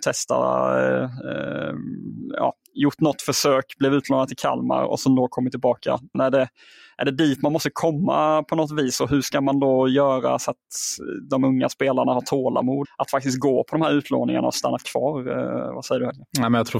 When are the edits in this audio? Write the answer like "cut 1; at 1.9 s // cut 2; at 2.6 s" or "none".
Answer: cut 1; at 6.1 s // cut 2; at 12.8 s